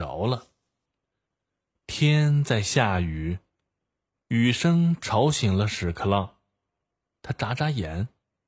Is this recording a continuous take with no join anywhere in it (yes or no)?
yes